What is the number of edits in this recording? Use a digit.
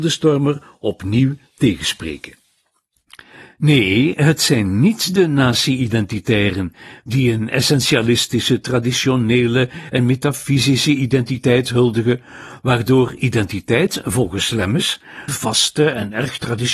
1